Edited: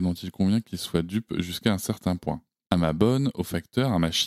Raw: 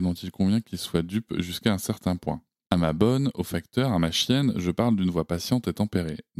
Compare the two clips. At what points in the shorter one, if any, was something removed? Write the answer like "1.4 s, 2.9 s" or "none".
none